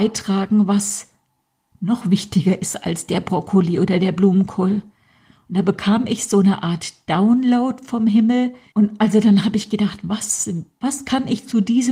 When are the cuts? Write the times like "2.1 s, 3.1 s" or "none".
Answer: 8.7 s